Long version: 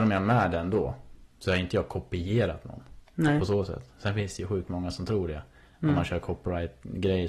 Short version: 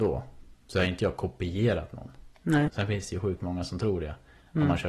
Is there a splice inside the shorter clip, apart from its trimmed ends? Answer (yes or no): yes